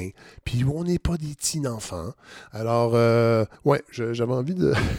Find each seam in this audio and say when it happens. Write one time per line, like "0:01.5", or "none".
0:03.6